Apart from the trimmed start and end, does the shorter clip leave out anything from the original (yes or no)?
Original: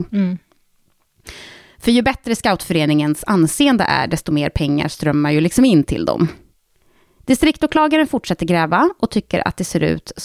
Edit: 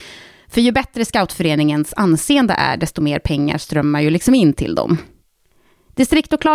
no